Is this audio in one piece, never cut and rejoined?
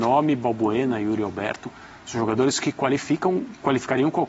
yes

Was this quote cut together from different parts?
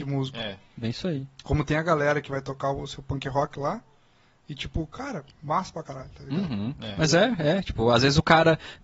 no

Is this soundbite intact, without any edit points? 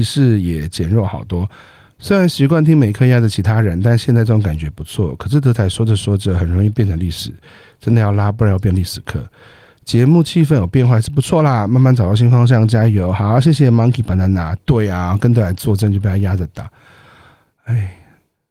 yes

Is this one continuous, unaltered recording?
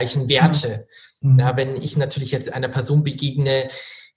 yes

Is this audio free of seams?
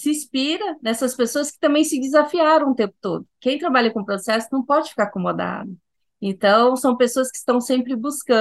no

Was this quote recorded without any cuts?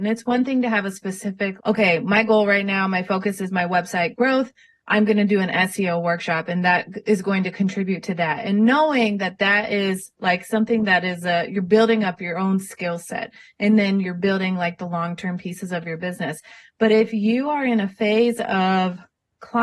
no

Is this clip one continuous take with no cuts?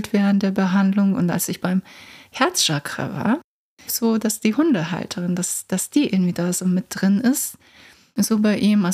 no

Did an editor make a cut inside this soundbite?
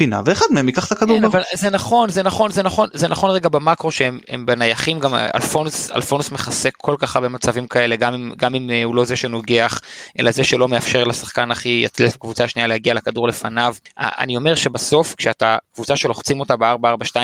no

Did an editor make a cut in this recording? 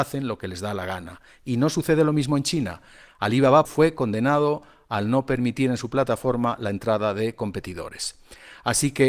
yes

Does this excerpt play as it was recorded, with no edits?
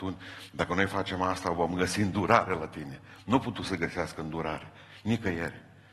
yes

